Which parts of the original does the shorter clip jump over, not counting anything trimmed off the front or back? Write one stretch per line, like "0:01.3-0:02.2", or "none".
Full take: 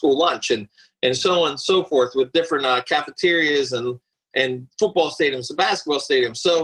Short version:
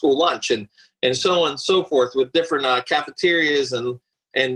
none